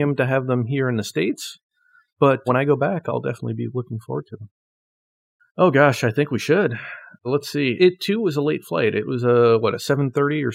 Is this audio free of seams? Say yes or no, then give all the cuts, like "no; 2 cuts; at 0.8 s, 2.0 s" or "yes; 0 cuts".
no; 1 cut; at 5.4 s